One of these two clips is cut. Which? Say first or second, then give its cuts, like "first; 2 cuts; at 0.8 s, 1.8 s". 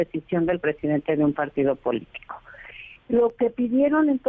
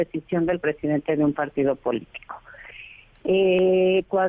first; 1 cut; at 2.9 s